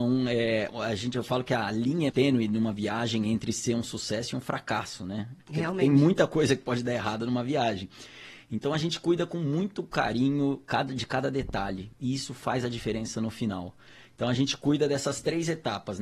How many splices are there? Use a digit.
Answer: 1